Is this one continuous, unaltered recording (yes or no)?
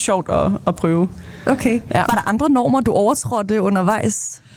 no